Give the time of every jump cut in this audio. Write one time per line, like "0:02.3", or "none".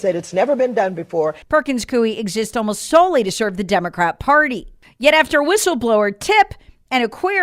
0:01.4